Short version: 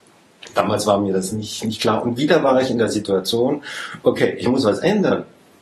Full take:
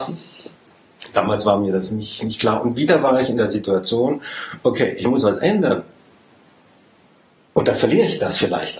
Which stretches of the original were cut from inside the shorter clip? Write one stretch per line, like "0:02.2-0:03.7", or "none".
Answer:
none